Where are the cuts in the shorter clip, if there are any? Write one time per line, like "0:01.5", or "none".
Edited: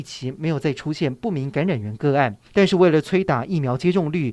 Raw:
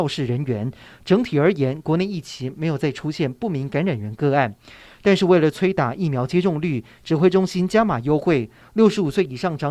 0:02.5